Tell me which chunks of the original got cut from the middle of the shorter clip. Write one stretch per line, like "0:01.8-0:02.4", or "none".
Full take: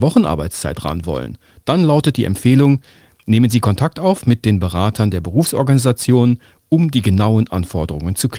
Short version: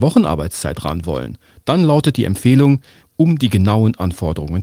0:03.0-0:06.5